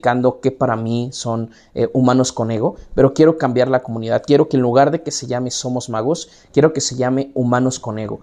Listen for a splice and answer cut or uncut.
uncut